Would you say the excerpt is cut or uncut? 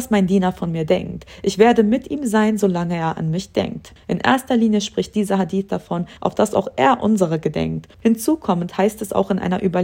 cut